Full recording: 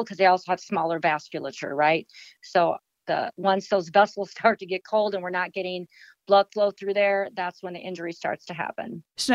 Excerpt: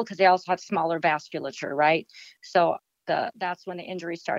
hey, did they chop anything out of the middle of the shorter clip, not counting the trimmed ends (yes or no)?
yes